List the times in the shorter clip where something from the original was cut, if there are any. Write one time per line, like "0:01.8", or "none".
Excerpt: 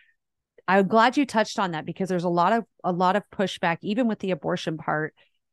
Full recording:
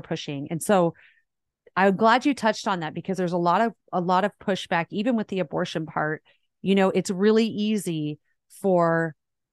none